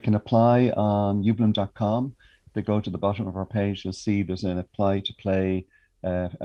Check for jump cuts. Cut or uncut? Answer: uncut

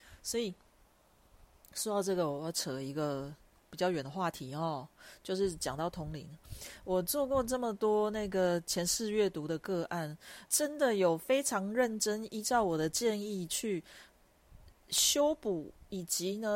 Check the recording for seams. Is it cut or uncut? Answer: cut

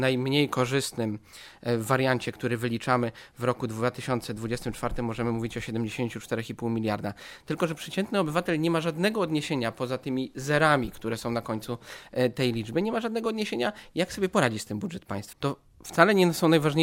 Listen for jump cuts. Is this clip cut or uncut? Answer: cut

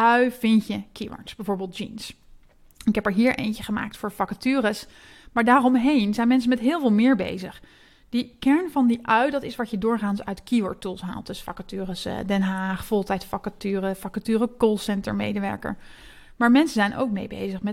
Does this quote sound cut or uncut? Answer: uncut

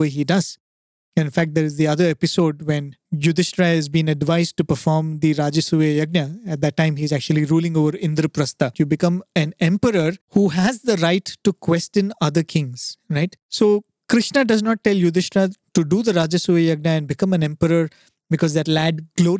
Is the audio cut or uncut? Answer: cut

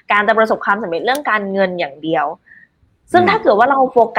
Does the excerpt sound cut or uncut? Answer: uncut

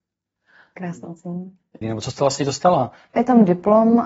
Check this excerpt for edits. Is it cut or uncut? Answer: cut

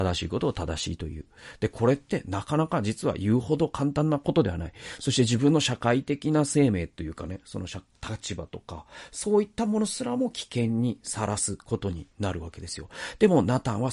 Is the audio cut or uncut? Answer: uncut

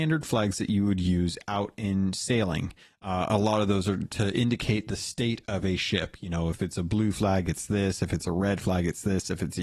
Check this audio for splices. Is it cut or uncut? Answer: uncut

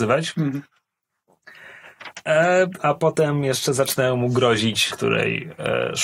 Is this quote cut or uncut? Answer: cut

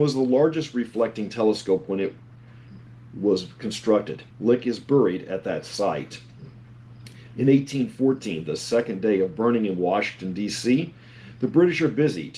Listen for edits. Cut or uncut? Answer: cut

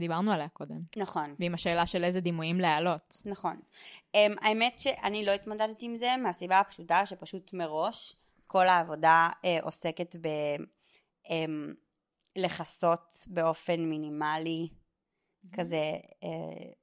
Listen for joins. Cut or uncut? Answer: cut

